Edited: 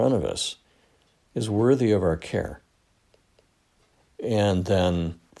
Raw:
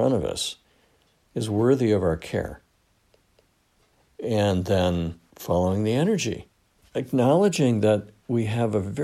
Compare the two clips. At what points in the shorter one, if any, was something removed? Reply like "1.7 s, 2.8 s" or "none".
none